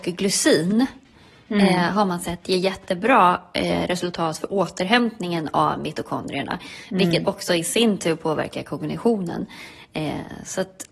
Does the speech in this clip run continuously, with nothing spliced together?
yes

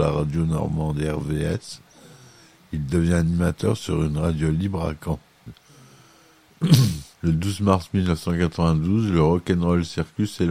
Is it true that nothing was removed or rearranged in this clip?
no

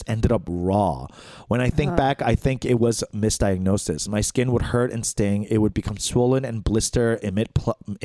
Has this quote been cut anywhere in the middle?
no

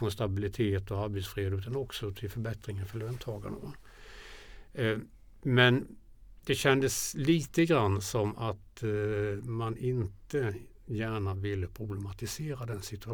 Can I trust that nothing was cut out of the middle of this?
yes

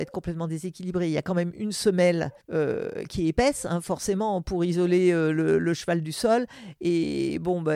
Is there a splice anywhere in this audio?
yes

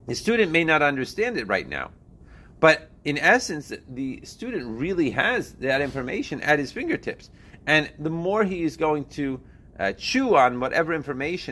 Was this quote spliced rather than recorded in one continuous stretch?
no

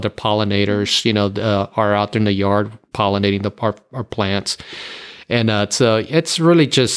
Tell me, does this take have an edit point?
no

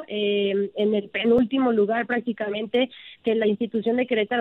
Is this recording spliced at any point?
yes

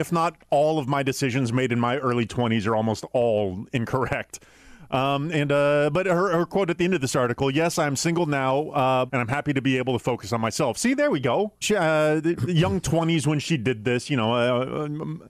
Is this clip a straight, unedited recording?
no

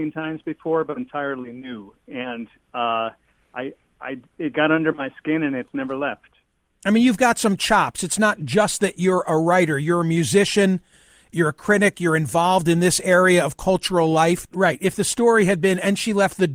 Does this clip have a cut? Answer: yes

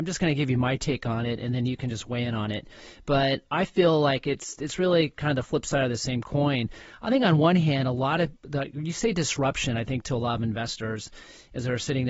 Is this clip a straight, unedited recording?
yes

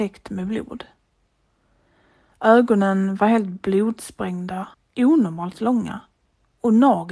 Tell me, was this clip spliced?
yes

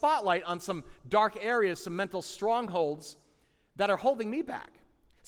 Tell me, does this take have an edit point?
no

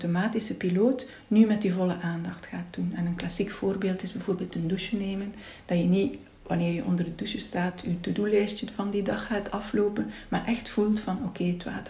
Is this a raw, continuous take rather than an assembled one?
yes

